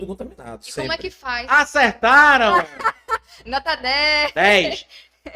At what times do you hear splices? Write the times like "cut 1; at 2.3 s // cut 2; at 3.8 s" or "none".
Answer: none